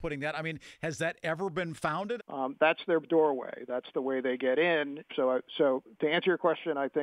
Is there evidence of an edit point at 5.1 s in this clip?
yes; 2 cuts; at 2.2 s, 5.1 s

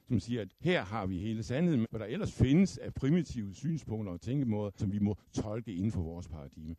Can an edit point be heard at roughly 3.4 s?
no; 2 cuts; at 1.8 s, 4.8 s

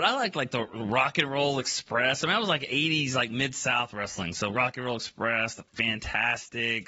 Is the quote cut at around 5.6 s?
no; 0 cuts

